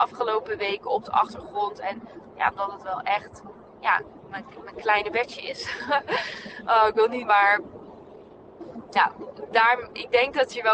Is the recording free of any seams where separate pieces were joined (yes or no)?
no